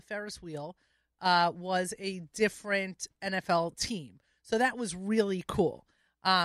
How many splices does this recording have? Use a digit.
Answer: 0